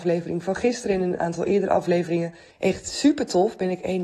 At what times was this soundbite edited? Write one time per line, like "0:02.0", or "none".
0:02.5